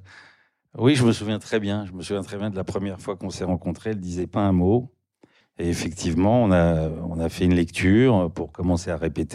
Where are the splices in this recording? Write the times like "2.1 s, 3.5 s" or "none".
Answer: 5.4 s